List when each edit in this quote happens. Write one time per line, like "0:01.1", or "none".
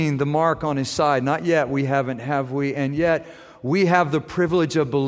none

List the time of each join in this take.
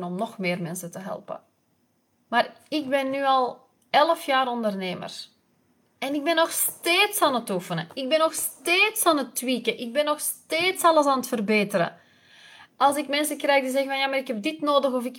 none

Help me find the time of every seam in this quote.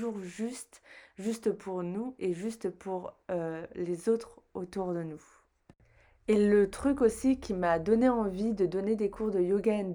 none

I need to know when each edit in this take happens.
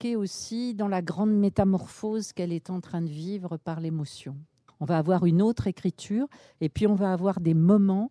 0:04.7

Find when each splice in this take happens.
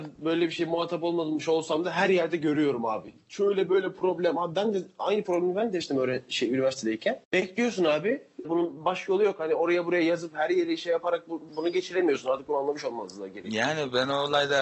0:07.2
0:08.4
0:11.5

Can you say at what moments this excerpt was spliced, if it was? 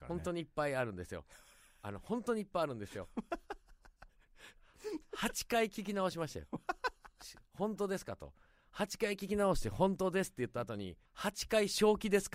0:04.1
0:11.1

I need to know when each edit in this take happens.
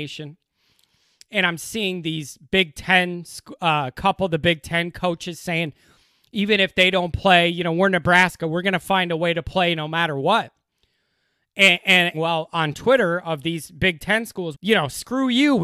0:12.1
0:14.5

